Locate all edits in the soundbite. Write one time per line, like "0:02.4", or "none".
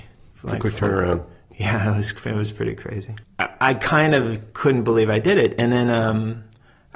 0:03.2